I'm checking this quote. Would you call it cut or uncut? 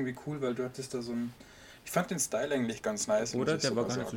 uncut